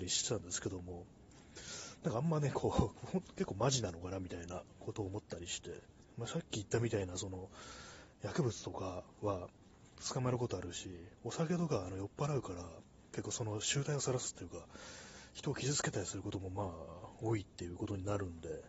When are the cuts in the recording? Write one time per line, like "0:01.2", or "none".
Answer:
none